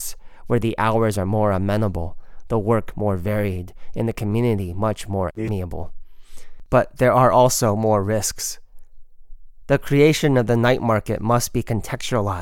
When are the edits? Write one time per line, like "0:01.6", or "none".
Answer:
none

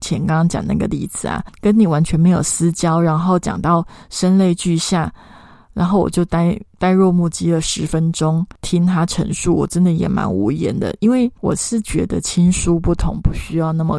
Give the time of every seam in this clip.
none

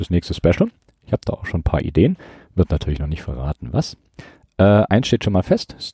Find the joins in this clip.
none

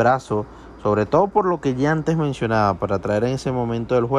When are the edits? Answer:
none

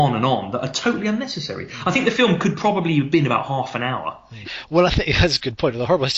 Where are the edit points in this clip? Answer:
0:04.4

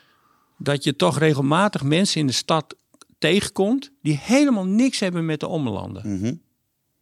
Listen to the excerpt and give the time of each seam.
none

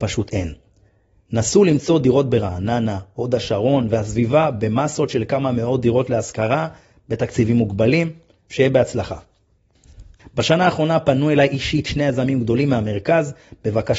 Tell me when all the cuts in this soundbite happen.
0:10.2

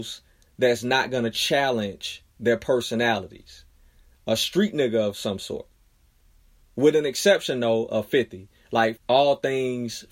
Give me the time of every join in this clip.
0:09.0

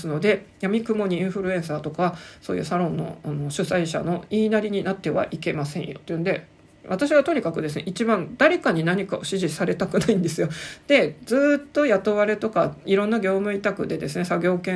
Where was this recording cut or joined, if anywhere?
none

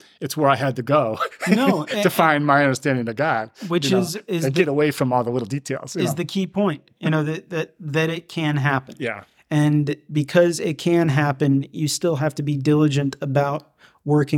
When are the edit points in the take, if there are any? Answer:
none

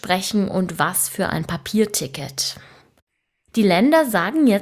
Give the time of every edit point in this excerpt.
0:03.5

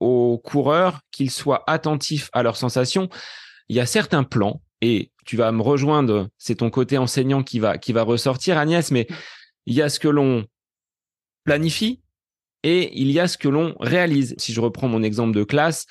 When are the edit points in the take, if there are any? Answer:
0:14.4

